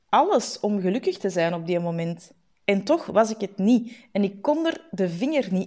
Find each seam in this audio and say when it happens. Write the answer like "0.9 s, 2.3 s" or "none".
none